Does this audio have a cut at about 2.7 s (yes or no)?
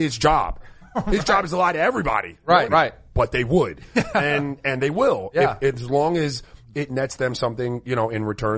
yes